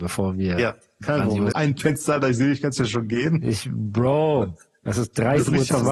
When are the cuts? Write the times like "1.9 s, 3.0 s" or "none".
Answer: 1.5 s